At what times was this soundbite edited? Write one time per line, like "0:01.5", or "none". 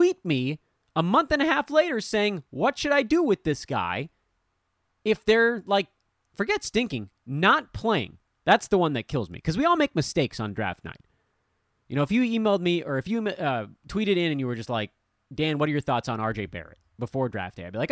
none